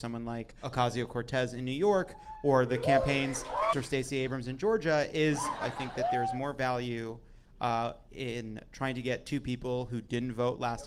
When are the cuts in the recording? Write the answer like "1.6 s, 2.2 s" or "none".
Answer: 3.7 s